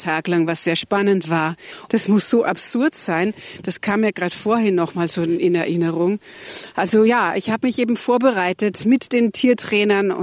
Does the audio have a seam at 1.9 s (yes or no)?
yes